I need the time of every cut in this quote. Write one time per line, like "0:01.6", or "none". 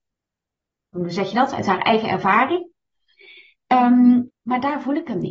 0:04.3